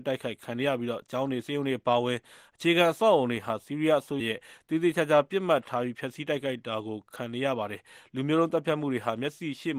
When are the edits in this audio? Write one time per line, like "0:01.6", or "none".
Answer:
0:04.2